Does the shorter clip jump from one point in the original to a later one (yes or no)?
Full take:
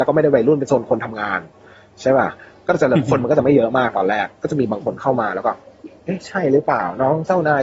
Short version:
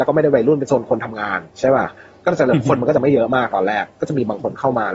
yes